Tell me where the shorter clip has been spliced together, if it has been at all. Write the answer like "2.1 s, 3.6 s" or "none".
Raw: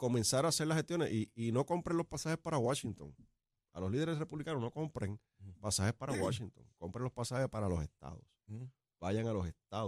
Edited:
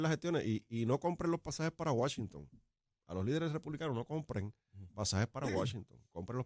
none